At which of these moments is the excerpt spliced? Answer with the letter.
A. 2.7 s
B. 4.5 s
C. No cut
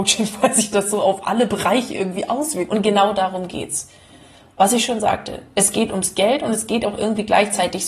A